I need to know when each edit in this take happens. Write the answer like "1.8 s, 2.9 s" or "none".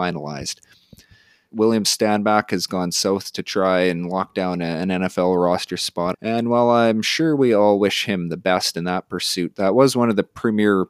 1.5 s, 6.1 s